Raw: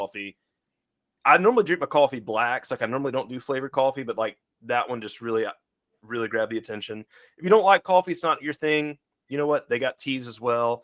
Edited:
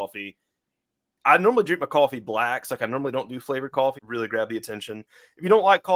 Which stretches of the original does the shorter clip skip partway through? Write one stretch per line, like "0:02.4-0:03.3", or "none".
0:04.0-0:06.0